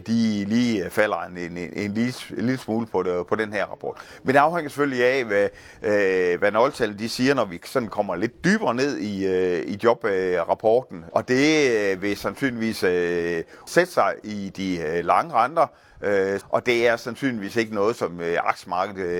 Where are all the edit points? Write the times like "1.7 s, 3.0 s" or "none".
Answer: 11.1 s, 13.7 s, 16.4 s

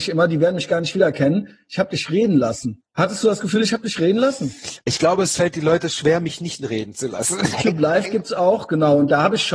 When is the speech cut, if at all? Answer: 7.5 s

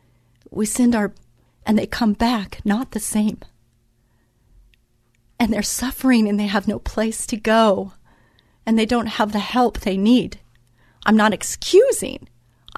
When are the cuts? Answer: 1.5 s

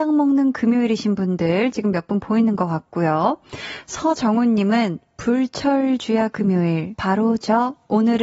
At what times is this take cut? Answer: 3.8 s, 6.9 s

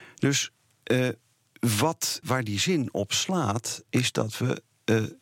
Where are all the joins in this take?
2.2 s

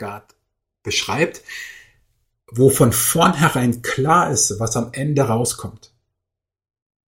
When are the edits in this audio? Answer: none

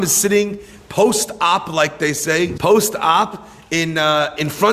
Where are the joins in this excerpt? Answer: 2.6 s

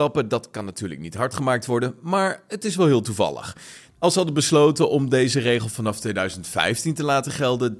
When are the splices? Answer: 3.9 s

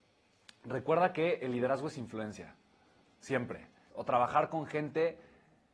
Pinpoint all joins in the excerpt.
3.9 s

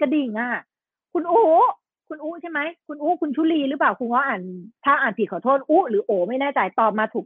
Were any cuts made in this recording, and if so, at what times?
4.8 s

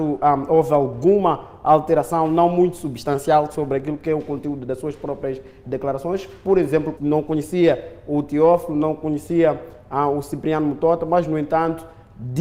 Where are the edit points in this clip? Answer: 7.0 s

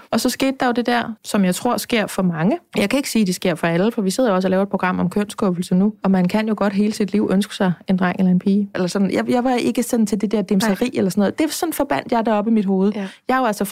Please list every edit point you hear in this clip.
1.2 s, 8.7 s

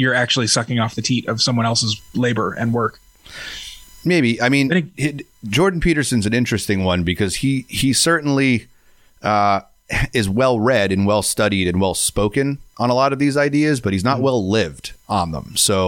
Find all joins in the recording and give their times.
none

